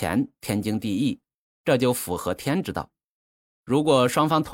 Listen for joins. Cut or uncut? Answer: cut